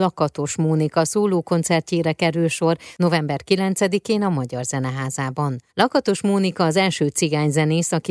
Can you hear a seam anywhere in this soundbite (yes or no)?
yes